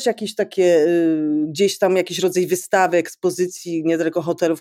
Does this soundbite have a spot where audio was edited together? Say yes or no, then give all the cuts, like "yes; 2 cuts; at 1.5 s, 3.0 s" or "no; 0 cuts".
no; 0 cuts